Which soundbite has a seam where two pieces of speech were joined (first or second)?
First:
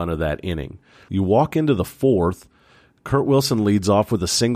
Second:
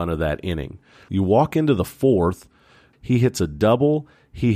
second